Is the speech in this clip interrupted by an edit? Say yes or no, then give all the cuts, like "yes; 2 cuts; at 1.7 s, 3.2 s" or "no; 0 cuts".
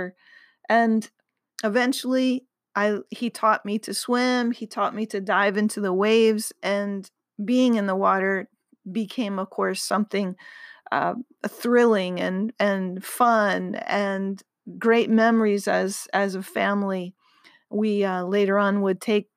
no; 0 cuts